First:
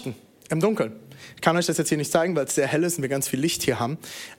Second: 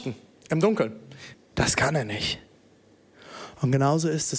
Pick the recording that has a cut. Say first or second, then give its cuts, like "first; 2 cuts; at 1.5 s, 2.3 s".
second; 1 cut; at 1.3 s